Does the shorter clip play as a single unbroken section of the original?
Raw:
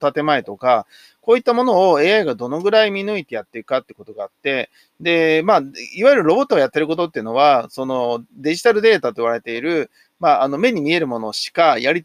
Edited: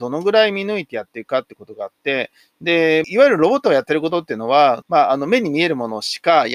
no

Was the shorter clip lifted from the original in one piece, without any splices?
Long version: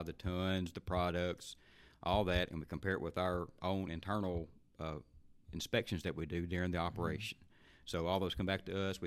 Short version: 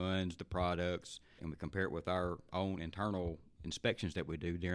no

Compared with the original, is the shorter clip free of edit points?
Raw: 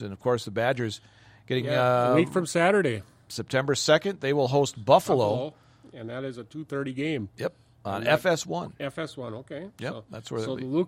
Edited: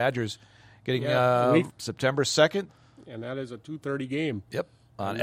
no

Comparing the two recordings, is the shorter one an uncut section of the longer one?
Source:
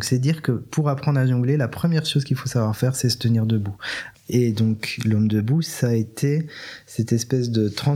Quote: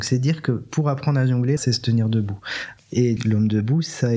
no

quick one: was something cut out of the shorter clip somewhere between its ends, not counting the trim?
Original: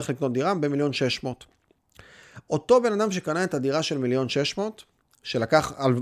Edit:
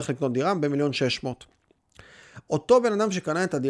no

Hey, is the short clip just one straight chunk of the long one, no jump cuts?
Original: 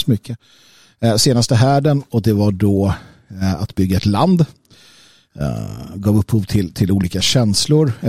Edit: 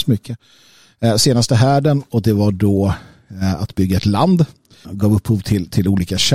no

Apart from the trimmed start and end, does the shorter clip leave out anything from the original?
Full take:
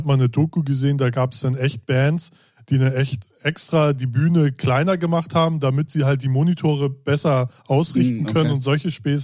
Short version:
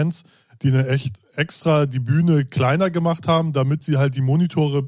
no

